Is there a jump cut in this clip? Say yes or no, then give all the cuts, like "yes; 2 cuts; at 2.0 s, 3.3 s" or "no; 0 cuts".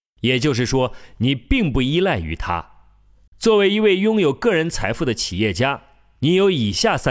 yes; 1 cut; at 3.3 s